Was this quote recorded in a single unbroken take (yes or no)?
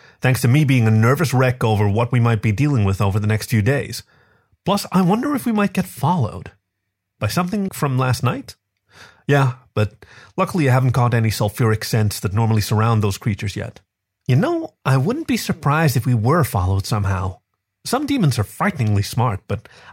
no